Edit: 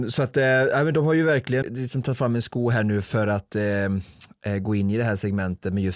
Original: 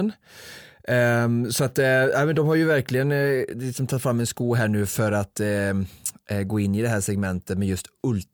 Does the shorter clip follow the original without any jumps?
no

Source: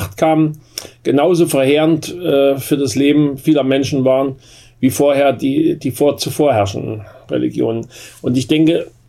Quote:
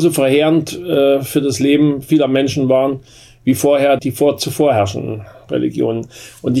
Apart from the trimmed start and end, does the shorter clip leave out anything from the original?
yes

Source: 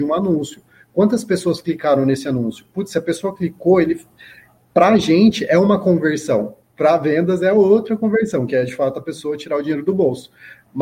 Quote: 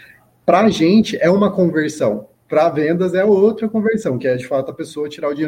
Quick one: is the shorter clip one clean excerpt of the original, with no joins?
yes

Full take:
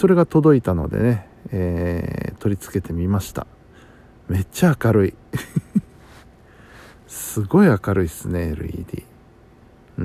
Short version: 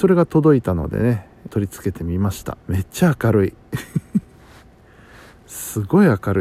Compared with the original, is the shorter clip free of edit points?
no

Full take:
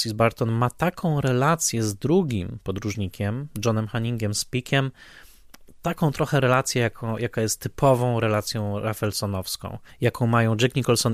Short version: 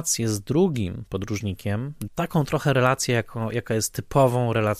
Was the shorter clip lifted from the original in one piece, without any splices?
no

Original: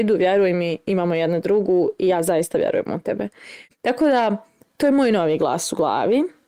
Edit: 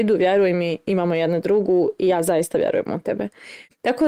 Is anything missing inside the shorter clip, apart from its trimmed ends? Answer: no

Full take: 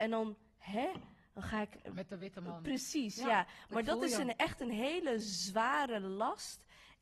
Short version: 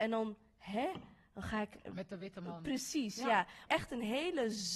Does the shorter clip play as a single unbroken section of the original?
no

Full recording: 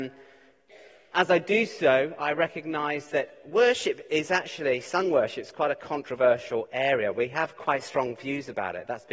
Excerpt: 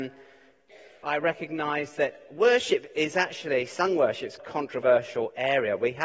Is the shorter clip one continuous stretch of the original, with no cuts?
no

